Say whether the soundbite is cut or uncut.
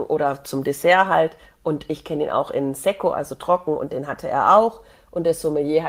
uncut